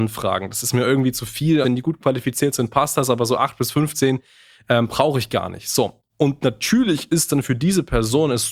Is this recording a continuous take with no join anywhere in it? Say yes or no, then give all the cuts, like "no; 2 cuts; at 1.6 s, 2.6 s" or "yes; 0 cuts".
no; 1 cut; at 1.6 s